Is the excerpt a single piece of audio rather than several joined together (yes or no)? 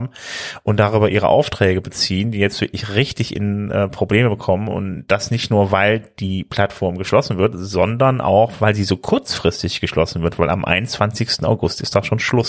yes